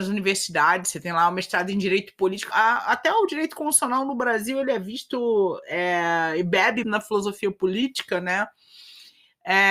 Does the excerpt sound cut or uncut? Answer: cut